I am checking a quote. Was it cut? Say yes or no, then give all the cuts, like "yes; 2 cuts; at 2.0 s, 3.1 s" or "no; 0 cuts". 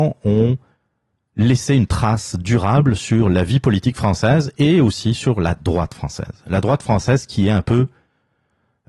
no; 0 cuts